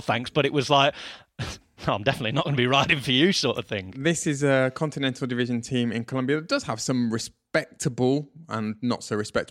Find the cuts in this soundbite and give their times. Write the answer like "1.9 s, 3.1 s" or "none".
none